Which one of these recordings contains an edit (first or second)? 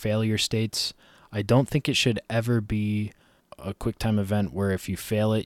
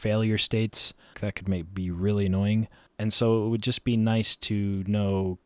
second